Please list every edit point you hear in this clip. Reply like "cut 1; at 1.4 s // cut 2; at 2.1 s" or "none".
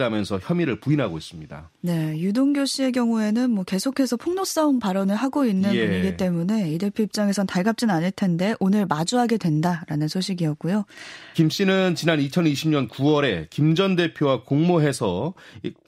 cut 1; at 11.3 s